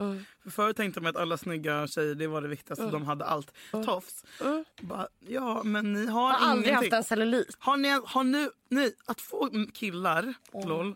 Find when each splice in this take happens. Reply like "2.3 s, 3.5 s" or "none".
3.7 s